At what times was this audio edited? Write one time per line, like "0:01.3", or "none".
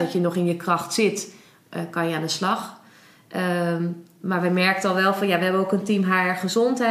none